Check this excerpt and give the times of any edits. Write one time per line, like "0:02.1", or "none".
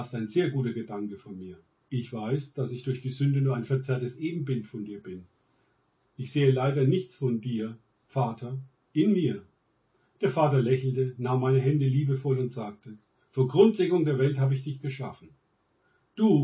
0:01.8